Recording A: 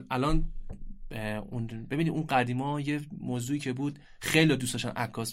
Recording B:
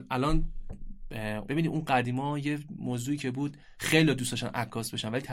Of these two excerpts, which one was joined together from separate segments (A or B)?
B